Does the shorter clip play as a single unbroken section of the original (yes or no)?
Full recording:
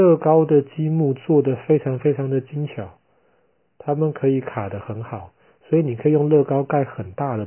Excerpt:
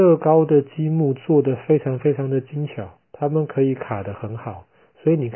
no